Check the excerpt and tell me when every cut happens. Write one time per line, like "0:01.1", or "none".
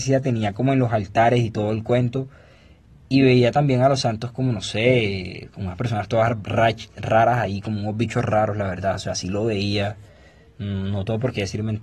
none